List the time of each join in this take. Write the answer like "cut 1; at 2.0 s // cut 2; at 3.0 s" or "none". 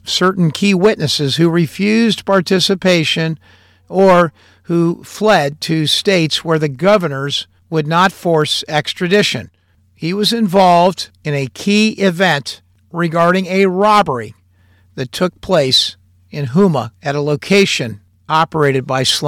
cut 1; at 9.8 s // cut 2; at 16.9 s